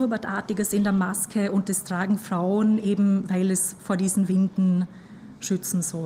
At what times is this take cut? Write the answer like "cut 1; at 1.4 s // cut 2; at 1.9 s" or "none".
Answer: none